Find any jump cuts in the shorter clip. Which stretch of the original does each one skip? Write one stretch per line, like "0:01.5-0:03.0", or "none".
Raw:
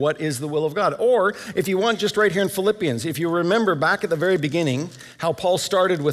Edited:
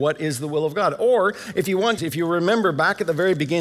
0:02.0-0:03.0